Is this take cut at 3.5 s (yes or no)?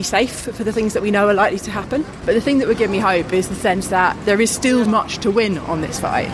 no